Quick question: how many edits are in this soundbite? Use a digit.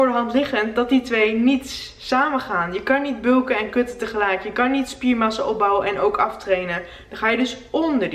1